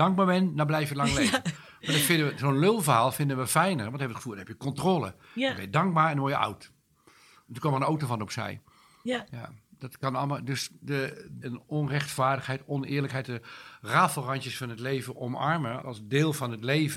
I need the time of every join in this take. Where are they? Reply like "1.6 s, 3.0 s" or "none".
11.4 s, 13.2 s, 15.8 s